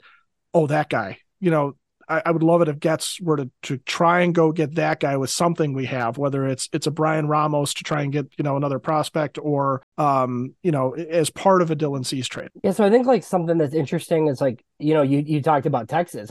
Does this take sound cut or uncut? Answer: uncut